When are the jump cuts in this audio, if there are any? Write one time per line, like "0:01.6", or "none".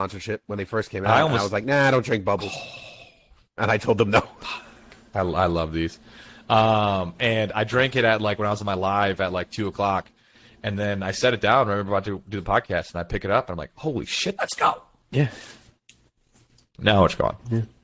0:14.4

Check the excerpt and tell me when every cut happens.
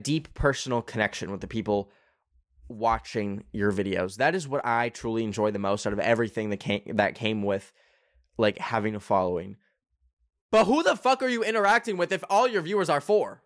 none

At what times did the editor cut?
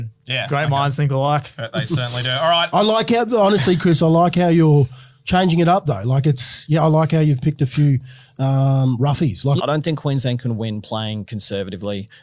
0:09.6

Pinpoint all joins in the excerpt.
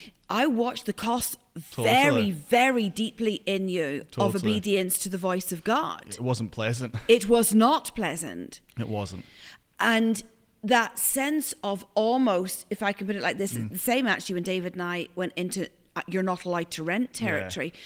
none

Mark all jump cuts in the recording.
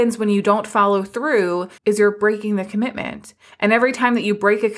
0:01.8

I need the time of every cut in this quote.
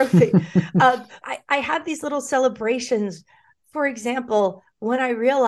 0:01.2

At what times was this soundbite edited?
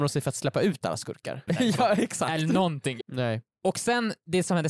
0:01.5
0:03.0

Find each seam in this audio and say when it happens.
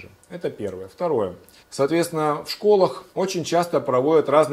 0:01.6
0:03.1

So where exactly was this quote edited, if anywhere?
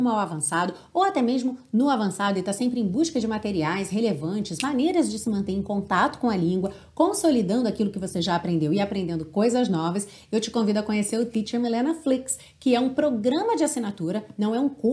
none

